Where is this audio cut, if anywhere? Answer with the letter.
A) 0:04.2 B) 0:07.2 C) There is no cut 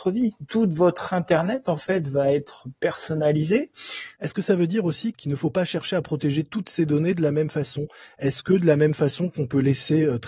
A